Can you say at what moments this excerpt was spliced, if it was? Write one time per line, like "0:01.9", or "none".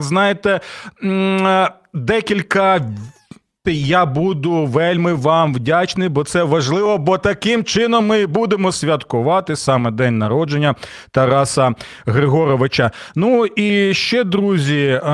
0:03.6